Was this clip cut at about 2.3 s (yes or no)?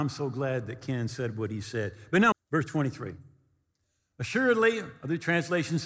yes